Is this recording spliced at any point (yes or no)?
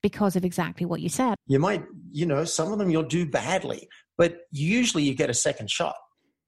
yes